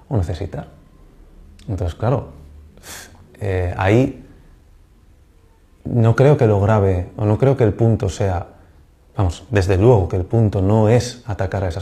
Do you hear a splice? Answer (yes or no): no